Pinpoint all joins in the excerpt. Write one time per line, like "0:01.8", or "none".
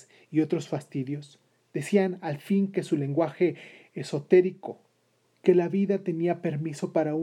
0:05.2